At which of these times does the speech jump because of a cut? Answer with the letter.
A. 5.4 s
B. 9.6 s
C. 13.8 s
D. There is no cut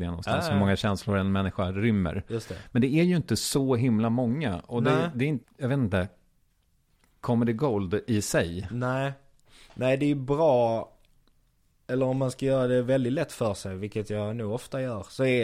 A